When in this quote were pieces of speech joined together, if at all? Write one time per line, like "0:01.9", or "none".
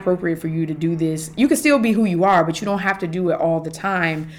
none